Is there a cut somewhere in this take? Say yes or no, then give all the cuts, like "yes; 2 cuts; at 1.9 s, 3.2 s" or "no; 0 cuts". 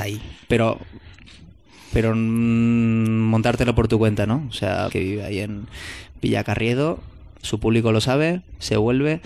yes; 2 cuts; at 4.9 s, 7.4 s